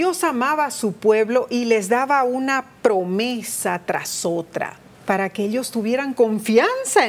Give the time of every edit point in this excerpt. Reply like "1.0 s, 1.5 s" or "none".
4.9 s